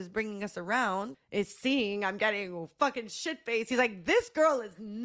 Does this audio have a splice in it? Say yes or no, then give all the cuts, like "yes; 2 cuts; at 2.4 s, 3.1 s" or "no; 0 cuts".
yes; 1 cut; at 1.1 s